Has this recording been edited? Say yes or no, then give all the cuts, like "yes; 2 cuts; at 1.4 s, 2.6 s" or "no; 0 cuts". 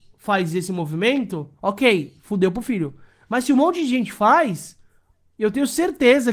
no; 0 cuts